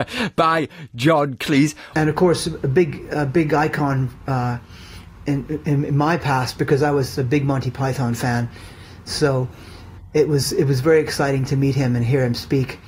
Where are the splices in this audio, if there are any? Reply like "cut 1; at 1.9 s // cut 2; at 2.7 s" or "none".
cut 1; at 1.9 s